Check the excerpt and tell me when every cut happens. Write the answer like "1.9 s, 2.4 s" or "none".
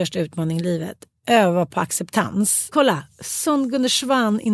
2.7 s